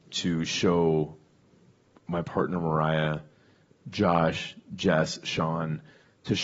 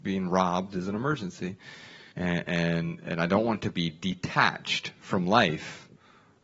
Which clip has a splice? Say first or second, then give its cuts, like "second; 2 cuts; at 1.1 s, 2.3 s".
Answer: second; 1 cut; at 2.1 s